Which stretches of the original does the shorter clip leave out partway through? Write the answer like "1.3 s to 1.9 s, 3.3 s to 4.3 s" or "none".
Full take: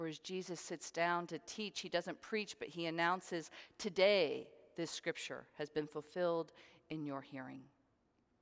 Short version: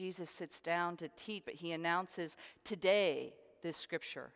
1.7 s to 2.6 s